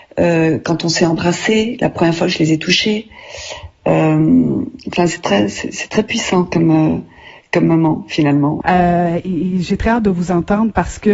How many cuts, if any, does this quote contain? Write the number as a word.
one